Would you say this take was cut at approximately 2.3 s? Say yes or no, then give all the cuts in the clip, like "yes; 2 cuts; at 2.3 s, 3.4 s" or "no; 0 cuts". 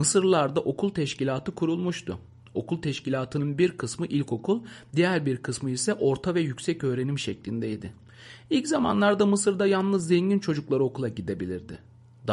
no; 0 cuts